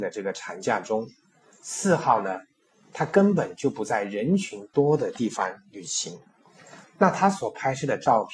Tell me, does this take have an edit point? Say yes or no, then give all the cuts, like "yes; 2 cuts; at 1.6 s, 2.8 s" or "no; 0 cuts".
yes; 1 cut; at 6.8 s